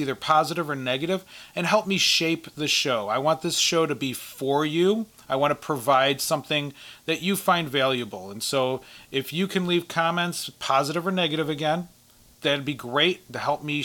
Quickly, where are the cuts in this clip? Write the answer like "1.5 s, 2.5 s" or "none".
none